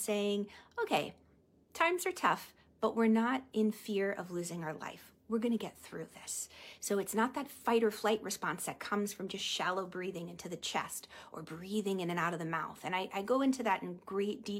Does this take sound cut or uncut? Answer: uncut